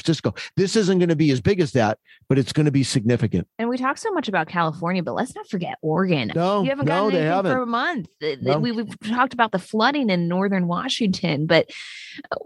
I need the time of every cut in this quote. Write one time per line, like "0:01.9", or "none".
0:03.5
0:06.3